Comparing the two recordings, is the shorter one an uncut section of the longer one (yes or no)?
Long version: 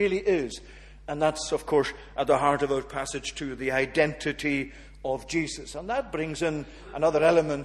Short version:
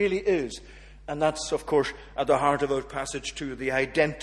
yes